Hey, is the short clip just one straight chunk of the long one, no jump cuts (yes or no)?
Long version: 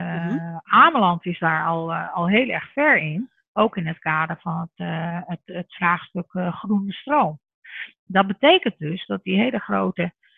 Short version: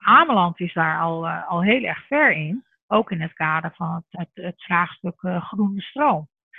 no